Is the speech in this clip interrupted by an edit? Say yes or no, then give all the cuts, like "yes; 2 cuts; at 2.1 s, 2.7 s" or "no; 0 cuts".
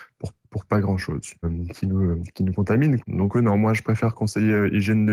yes; 2 cuts; at 1.4 s, 3.0 s